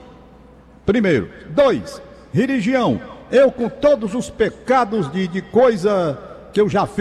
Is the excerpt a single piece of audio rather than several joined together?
yes; 0 cuts

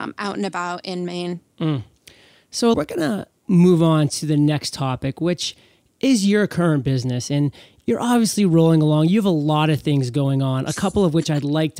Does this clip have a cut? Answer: yes; 1 cut; at 2.7 s

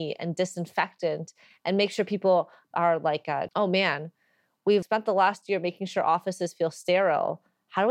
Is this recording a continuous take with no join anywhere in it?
no; 2 cuts; at 3.5 s, 4.8 s

